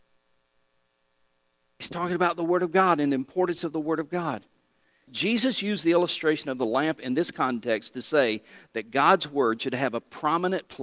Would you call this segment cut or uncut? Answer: cut